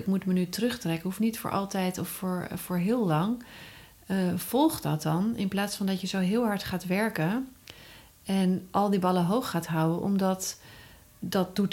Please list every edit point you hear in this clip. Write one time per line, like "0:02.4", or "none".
none